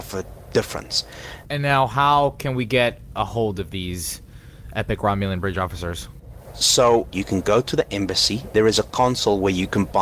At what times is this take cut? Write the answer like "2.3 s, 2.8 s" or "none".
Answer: 1.4 s, 7.1 s, 8.5 s